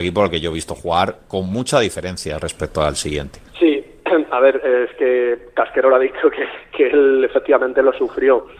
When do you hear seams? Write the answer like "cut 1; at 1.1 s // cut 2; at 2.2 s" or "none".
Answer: cut 1; at 3.5 s